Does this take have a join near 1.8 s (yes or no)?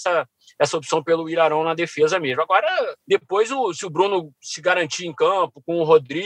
no